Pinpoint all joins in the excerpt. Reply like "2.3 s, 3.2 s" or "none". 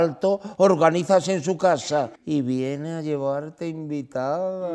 2.1 s